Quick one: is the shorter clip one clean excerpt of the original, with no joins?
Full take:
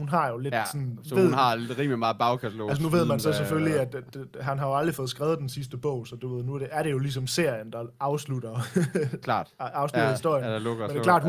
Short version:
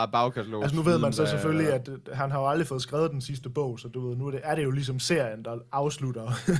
no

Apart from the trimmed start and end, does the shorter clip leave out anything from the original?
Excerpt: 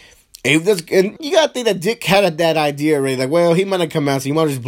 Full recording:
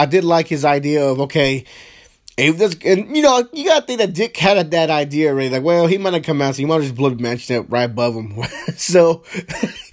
yes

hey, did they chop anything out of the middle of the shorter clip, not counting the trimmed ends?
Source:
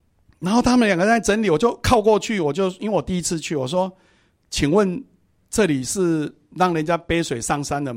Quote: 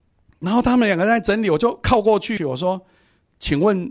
yes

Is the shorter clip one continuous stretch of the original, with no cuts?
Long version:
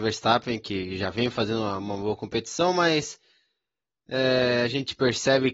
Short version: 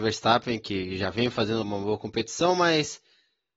no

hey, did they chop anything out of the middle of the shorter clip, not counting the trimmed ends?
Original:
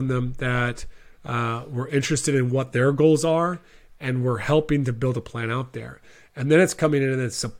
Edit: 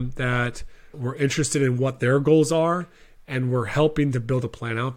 yes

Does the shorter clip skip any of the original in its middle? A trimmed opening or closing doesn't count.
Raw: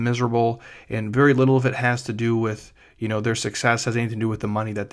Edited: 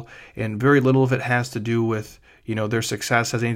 no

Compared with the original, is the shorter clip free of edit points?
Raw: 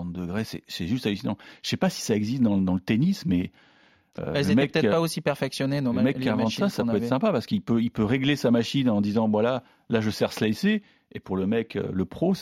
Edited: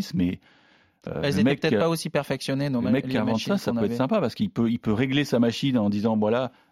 yes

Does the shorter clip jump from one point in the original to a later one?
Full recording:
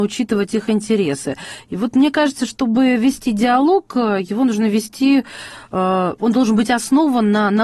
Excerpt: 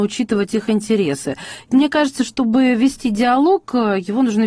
yes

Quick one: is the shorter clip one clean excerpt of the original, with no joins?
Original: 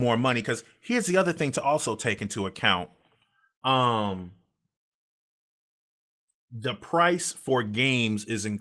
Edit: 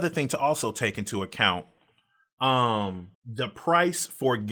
no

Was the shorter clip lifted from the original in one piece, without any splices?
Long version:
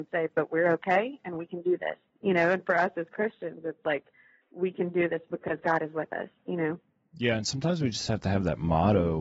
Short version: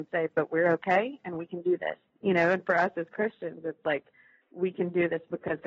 yes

